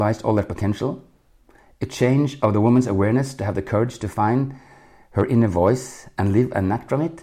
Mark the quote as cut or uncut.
uncut